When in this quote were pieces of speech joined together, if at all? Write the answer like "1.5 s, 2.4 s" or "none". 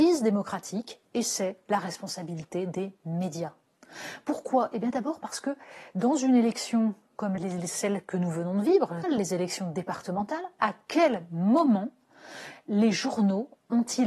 7.4 s, 9.0 s